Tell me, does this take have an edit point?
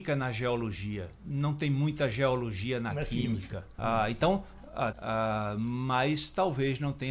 yes; 3 cuts; at 1.2 s, 3.8 s, 4.9 s

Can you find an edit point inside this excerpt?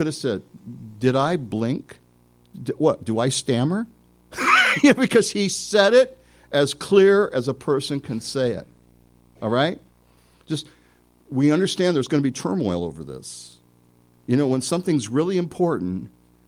no; 0 cuts

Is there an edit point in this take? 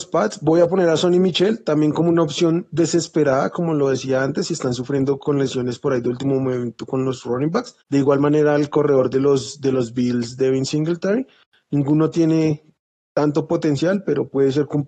yes; 1 cut; at 7.8 s

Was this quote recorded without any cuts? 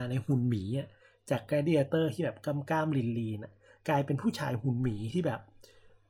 yes; 0 cuts

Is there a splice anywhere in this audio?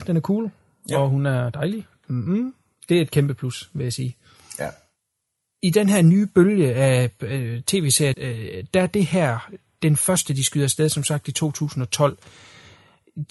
yes; 1 cut; at 8.1 s

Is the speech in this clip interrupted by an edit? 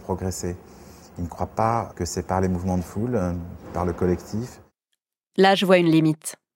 yes; 1 cut; at 1.9 s

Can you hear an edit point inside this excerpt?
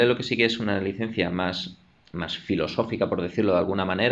no; 0 cuts

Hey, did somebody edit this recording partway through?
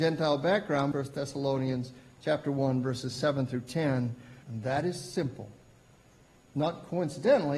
yes; 2 cuts; at 0.9 s, 4.4 s

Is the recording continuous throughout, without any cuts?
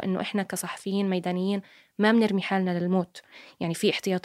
yes; 0 cuts

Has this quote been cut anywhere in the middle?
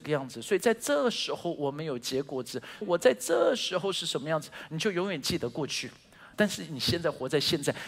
yes; 2 cuts; at 2.8 s, 6.3 s

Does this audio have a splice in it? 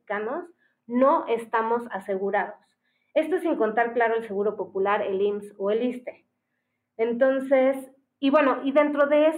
no; 0 cuts

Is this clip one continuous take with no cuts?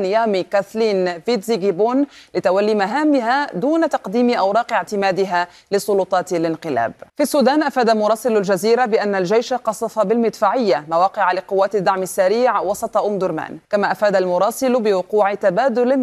no; 2 cuts; at 7.1 s, 13.6 s

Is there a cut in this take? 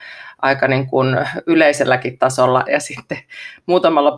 yes; 1 cut; at 2.6 s

